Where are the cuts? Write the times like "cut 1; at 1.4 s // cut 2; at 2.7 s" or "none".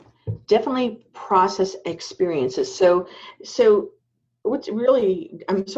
none